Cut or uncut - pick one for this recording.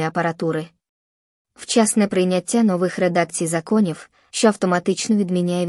cut